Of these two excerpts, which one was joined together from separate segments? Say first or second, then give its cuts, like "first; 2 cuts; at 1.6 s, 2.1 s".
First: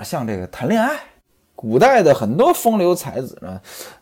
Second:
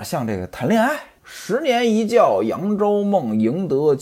second; 1 cut; at 1.2 s